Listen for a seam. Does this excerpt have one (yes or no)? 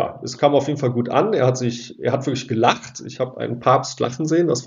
no